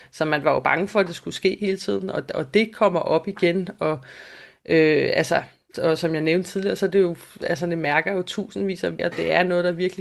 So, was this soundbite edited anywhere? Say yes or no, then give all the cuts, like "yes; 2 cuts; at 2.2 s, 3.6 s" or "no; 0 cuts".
yes; 2 cuts; at 5.7 s, 9.0 s